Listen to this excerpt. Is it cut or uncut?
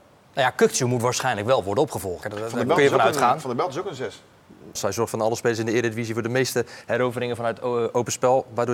cut